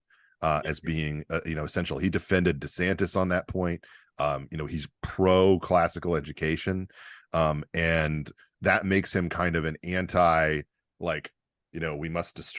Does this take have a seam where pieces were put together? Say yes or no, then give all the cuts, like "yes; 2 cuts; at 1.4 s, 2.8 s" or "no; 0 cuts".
no; 0 cuts